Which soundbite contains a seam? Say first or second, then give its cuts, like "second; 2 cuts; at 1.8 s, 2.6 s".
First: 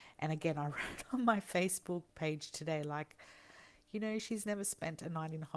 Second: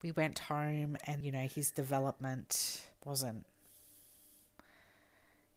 second; 2 cuts; at 1.2 s, 3.0 s